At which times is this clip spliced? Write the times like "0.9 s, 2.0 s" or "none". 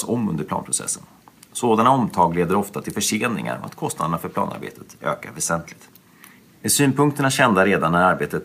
6.5 s